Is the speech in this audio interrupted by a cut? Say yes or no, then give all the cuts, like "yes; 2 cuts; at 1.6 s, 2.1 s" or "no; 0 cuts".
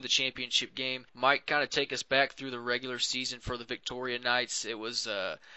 yes; 1 cut; at 1.1 s